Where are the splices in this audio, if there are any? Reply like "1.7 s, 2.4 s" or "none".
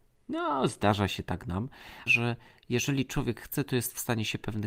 2.1 s